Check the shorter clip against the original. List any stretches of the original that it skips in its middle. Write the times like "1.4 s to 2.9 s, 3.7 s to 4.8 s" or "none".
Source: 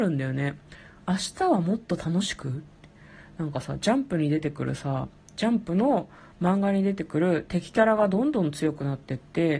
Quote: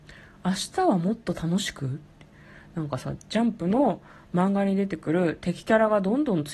3.8 s to 5.2 s